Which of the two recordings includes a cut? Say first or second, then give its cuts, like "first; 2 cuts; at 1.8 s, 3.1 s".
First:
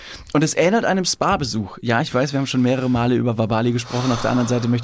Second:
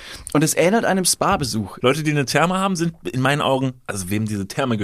second; 1 cut; at 1.8 s